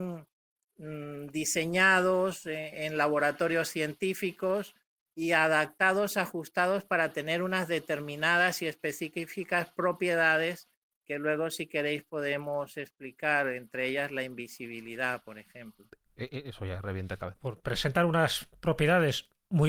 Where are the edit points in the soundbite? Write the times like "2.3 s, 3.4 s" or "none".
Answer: 17.4 s